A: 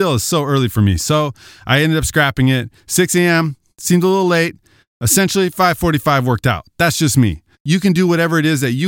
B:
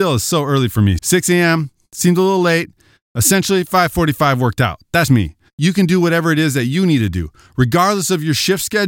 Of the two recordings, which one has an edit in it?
B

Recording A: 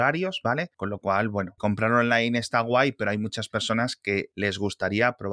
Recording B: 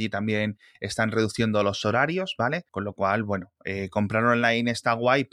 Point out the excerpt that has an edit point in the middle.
A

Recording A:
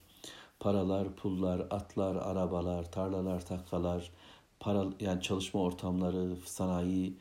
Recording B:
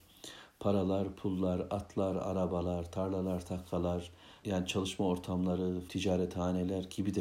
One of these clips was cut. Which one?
B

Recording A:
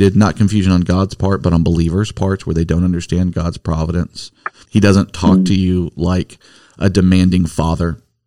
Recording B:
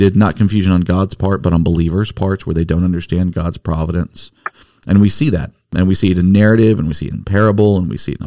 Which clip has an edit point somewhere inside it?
A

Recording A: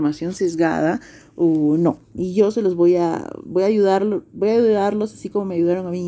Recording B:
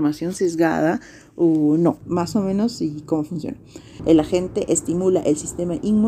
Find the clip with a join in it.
B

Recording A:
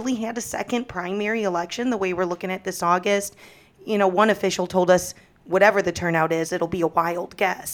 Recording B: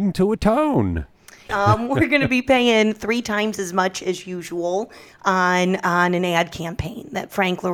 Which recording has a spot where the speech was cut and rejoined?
B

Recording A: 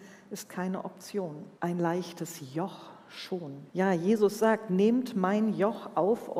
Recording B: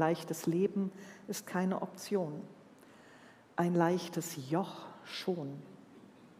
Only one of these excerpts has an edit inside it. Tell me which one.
A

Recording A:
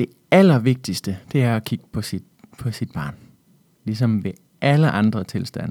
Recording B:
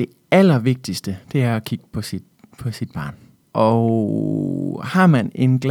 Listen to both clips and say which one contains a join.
B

